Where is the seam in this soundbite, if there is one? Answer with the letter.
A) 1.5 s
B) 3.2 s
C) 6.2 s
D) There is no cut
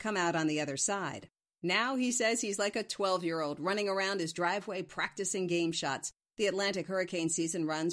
C